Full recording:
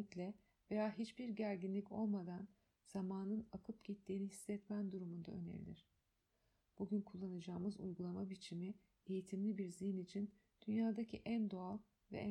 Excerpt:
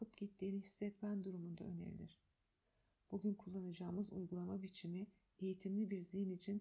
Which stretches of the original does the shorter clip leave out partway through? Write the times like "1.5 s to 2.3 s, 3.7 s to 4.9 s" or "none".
none